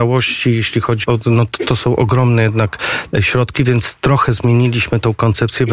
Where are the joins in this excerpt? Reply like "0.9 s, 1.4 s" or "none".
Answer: 1.0 s